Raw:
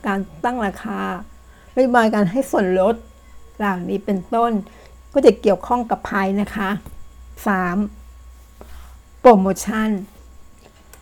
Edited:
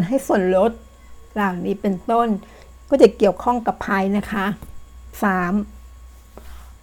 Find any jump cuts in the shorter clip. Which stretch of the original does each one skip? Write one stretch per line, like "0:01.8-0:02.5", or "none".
none